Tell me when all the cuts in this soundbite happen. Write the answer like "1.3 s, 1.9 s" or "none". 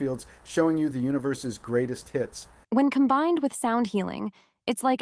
2.6 s